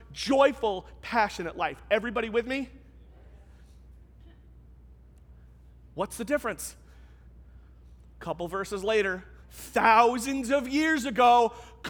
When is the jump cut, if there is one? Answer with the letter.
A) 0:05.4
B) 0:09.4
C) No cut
B